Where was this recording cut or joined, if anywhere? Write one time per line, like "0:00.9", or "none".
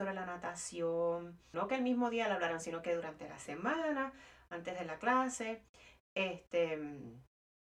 0:01.5